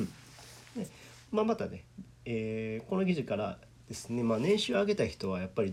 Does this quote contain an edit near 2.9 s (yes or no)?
no